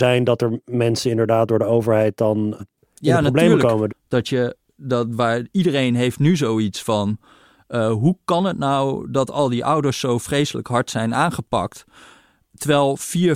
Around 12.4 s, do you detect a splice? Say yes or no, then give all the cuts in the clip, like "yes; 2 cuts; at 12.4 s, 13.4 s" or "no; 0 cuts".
no; 2 cuts; at 2.6 s, 3.9 s